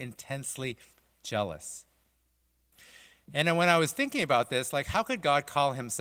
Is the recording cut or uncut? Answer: uncut